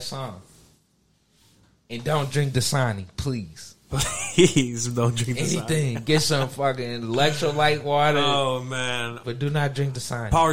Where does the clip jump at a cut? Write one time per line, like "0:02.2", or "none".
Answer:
0:09.2